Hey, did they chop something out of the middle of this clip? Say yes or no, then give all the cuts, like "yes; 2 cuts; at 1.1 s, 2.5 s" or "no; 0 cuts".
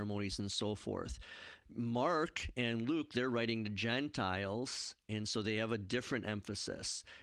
no; 0 cuts